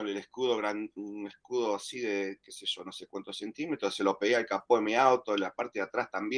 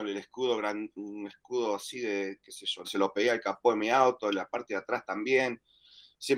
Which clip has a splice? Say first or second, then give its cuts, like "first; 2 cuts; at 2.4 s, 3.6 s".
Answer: second; 1 cut; at 2.8 s